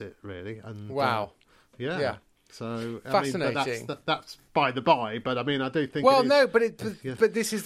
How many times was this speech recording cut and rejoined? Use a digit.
0